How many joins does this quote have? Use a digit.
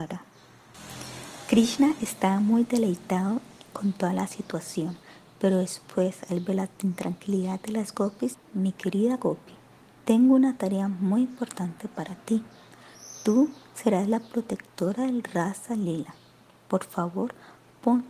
1